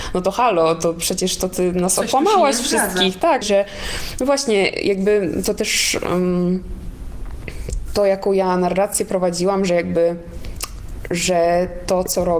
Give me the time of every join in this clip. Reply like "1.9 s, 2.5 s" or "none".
3.4 s